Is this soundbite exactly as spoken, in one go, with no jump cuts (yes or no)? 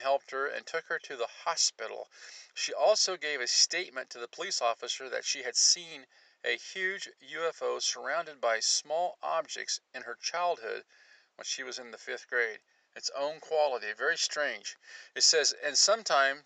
no